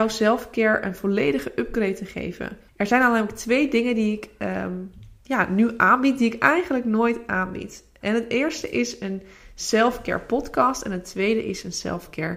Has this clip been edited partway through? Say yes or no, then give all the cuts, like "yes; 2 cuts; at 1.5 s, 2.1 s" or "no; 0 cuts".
yes; 1 cut; at 2.7 s